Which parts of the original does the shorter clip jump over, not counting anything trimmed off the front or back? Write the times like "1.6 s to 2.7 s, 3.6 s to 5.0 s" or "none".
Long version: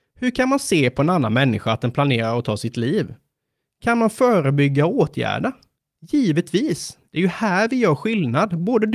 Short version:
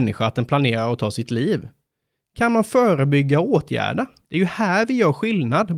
5.7 s to 7.1 s